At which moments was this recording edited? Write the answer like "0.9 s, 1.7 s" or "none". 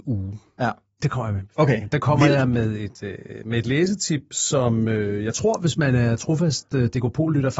1.0 s